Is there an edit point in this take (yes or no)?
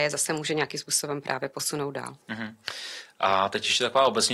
yes